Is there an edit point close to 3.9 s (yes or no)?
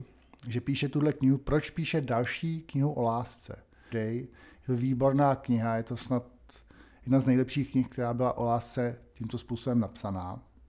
yes